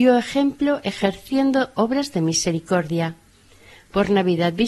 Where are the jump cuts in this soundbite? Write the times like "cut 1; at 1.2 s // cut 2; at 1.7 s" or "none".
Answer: none

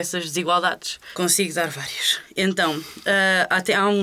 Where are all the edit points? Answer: cut 1; at 1.1 s

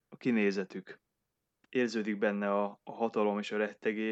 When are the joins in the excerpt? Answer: cut 1; at 1.6 s

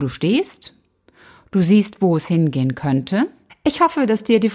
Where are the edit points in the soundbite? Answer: cut 1; at 3.5 s

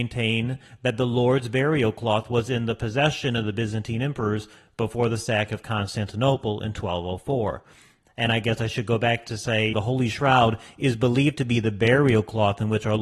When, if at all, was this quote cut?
cut 1; at 9.7 s

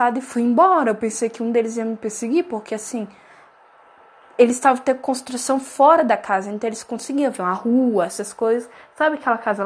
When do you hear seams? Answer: none

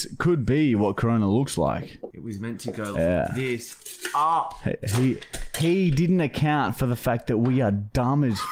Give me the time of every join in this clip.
cut 1; at 2.9 s

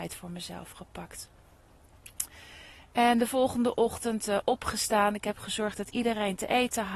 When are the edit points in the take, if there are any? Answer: none

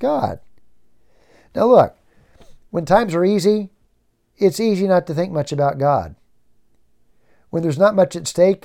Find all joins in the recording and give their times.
none

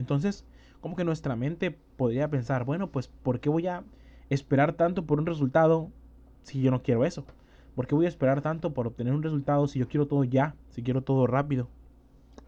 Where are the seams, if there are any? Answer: none

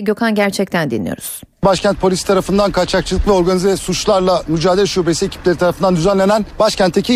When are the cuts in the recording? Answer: cut 1; at 1.5 s

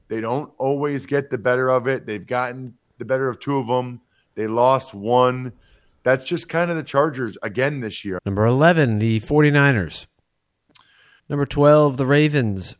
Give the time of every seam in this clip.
cut 1; at 8.2 s // cut 2; at 11.2 s

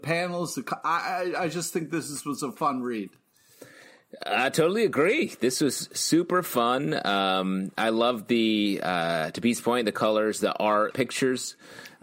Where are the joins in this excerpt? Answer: cut 1; at 10.9 s

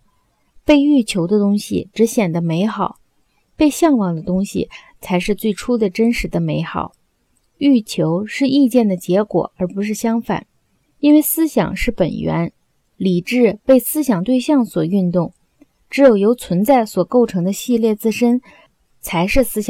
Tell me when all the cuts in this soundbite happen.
none

